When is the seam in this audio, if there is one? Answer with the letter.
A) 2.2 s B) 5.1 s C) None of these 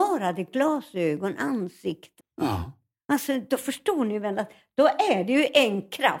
A